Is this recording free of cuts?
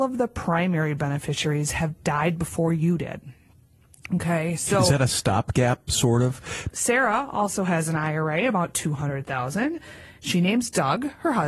no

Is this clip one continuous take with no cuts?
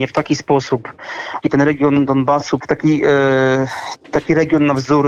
no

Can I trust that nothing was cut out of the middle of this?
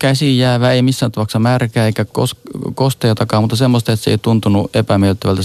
no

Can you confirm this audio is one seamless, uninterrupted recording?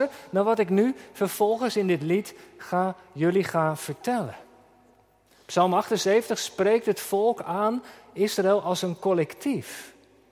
yes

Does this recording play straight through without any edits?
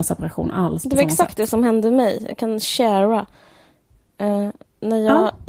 yes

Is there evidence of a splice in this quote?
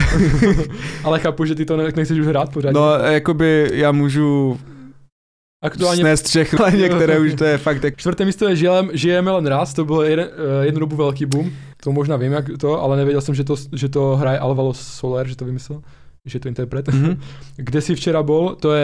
yes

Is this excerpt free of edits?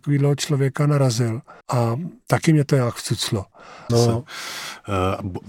no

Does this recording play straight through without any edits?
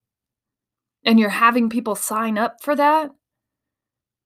yes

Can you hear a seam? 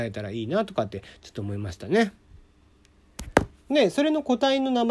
yes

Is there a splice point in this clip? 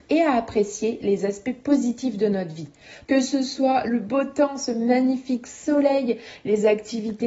yes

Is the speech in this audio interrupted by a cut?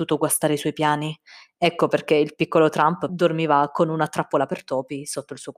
yes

